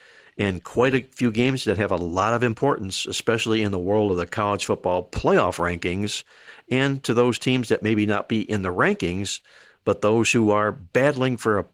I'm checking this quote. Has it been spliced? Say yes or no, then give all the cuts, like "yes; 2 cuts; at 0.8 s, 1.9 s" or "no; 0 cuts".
no; 0 cuts